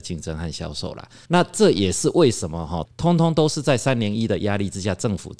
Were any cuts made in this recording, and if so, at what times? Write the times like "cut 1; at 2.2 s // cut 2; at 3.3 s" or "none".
cut 1; at 1.3 s // cut 2; at 2.9 s